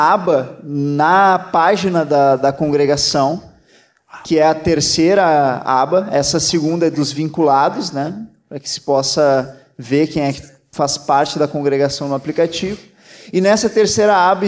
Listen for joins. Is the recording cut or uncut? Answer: uncut